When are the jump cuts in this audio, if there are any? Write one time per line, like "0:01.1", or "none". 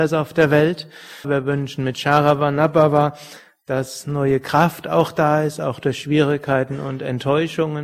0:01.2